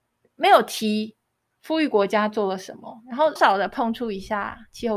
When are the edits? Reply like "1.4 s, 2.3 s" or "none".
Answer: 3.4 s